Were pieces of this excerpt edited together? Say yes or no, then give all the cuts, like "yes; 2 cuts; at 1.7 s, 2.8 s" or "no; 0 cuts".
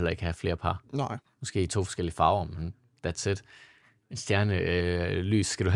no; 0 cuts